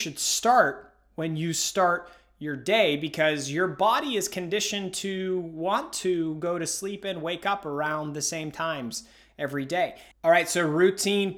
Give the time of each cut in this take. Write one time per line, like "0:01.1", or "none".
0:10.1

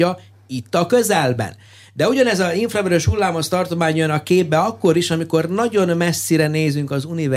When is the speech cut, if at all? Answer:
none

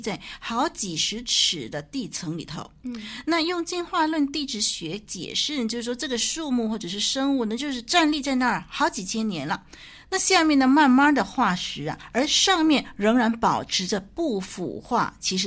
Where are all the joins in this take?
none

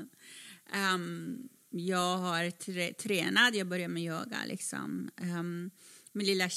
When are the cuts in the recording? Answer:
none

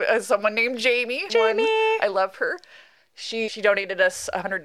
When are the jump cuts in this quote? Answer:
0:01.3
0:03.5

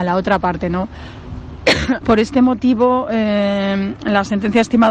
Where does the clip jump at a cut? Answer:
0:02.0

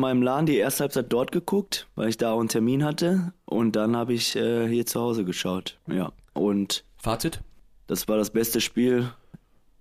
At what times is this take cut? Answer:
none

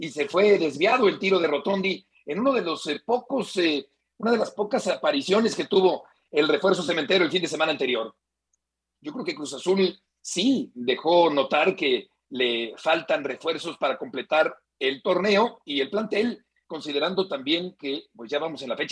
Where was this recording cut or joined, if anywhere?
0:09.0
0:10.7

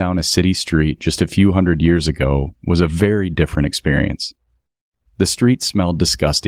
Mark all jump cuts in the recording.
none

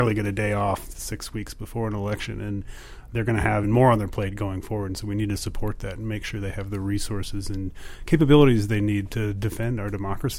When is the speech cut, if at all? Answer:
0:03.6

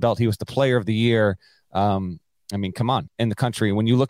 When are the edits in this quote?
0:03.1

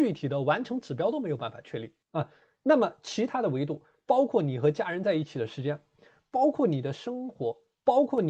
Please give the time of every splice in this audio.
0:02.0

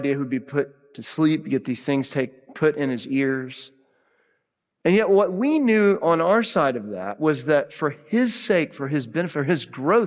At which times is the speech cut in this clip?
none

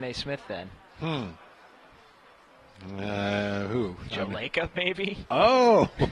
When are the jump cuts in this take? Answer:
none

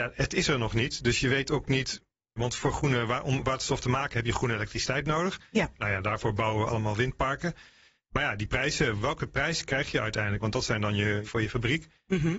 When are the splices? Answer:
0:02.4
0:11.3

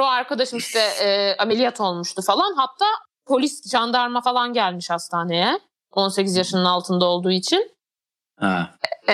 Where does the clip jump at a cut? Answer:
none

